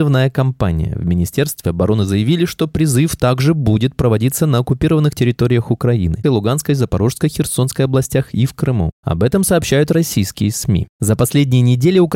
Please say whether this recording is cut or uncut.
cut